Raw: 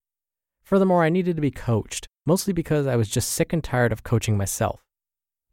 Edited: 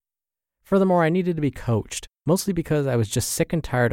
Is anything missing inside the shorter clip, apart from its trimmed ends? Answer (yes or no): no